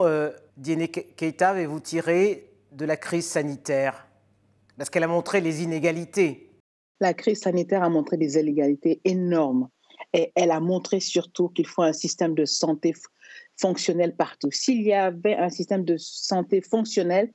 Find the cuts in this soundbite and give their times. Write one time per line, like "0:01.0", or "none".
none